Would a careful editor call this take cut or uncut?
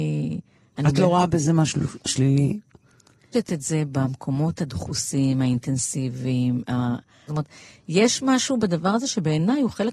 cut